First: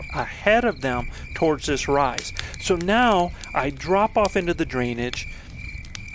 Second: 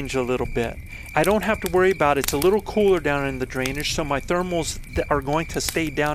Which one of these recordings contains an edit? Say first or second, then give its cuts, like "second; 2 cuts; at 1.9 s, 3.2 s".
second; 1 cut; at 1.1 s